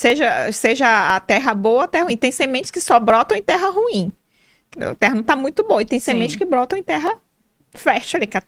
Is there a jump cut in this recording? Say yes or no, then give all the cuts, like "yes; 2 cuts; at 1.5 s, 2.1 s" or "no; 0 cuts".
no; 0 cuts